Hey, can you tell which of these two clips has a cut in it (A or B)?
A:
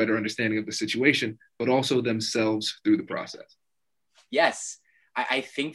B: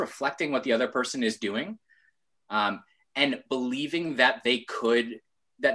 B